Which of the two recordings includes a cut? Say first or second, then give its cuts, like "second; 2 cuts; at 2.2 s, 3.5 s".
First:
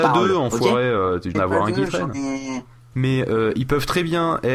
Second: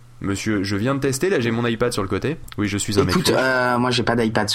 first; 2 cuts; at 1.3 s, 2.9 s